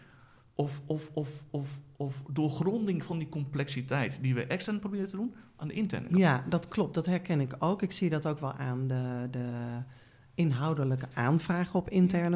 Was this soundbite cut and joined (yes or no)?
no